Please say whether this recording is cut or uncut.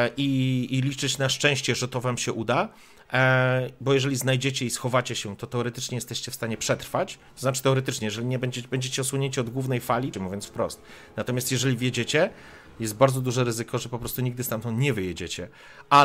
cut